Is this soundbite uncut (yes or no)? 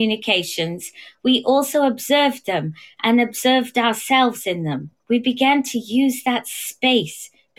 no